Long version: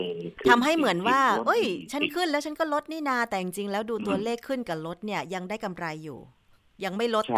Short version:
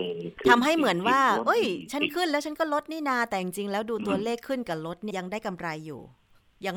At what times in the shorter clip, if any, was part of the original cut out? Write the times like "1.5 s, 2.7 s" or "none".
5.1 s